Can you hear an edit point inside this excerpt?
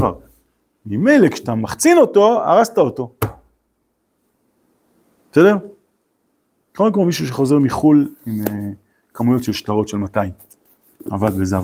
no; 0 cuts

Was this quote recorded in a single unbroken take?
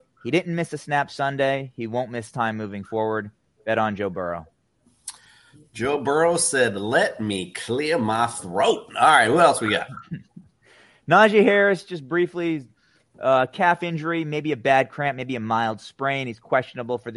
yes; 0 cuts

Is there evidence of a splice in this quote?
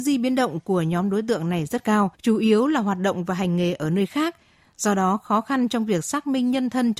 yes; 1 cut; at 2.1 s

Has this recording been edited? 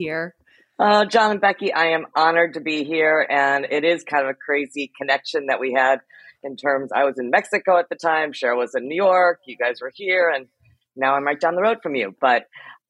no; 0 cuts

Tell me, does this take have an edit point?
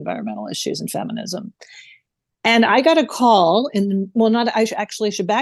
no; 0 cuts

